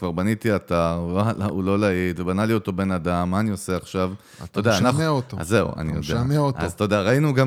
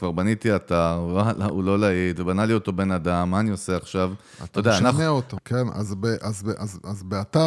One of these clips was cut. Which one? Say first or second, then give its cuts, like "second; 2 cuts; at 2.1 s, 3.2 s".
second; 1 cut; at 5.4 s